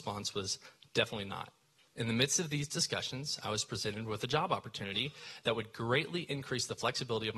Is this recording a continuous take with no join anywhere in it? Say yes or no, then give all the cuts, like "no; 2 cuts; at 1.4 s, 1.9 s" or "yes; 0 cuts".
no; 1 cut; at 1.9 s